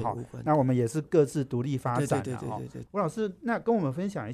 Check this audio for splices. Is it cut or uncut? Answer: cut